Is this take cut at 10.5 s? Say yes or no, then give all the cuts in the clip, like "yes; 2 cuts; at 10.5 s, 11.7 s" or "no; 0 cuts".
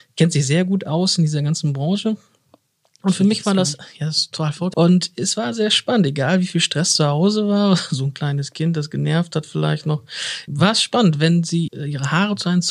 yes; 3 cuts; at 4.7 s, 10.5 s, 11.7 s